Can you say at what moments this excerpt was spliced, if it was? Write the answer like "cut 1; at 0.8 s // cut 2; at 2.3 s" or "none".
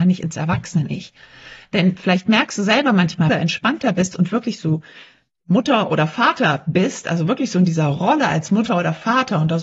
cut 1; at 3.3 s